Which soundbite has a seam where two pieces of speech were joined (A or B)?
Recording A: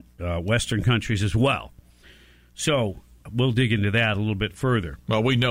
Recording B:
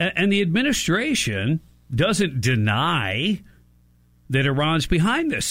A